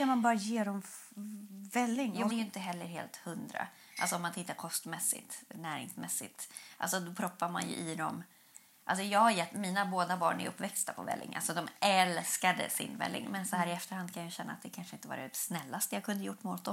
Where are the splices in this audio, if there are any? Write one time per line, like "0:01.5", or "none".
0:02.3